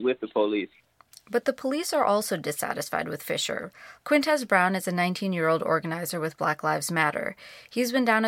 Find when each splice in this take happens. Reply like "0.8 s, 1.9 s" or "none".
4.0 s

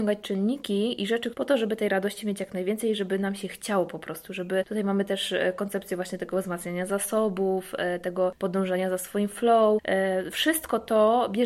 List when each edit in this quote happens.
1.3 s

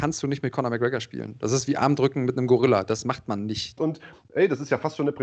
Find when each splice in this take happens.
3.8 s

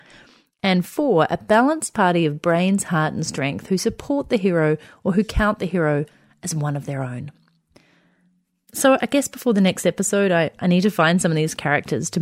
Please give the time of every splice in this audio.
none

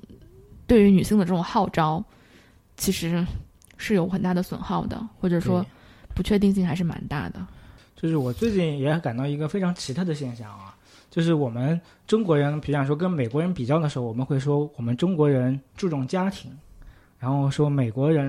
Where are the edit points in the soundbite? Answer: none

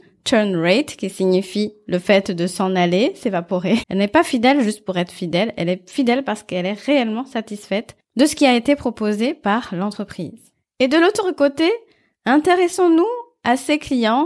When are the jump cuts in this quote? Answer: 3.8 s

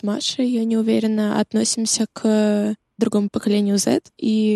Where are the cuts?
3.3 s

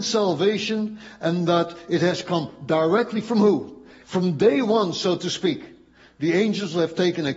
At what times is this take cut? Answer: 4.0 s

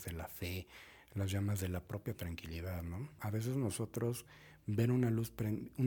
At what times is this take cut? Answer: 3.2 s

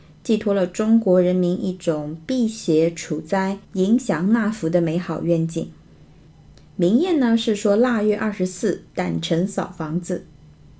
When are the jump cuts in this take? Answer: none

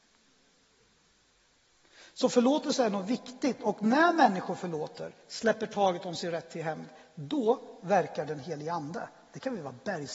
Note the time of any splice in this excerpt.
none

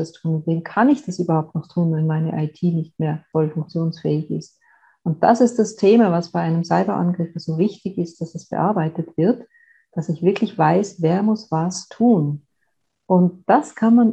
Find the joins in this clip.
none

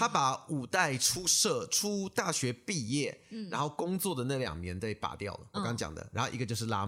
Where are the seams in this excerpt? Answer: 5.5 s

